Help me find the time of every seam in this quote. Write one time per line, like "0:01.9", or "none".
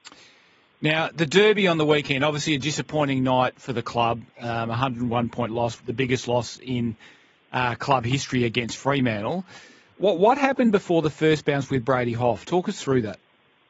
0:05.8